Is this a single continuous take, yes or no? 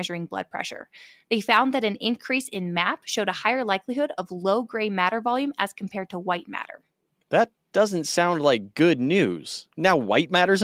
yes